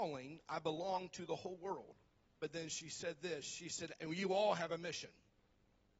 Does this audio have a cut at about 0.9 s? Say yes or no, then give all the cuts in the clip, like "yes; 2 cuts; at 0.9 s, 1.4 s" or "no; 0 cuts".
no; 2 cuts; at 2.2 s, 4.0 s